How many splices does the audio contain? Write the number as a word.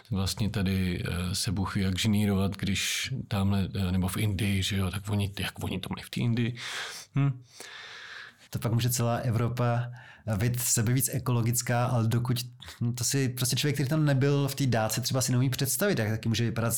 one